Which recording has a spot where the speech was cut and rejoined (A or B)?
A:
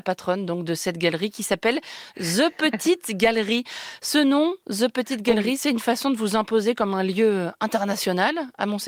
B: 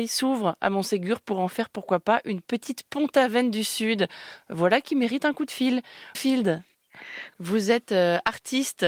B